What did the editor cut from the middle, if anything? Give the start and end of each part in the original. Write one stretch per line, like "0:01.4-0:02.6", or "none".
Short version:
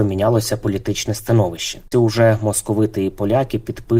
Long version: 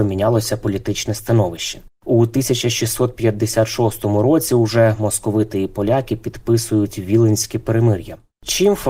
0:01.9-0:04.5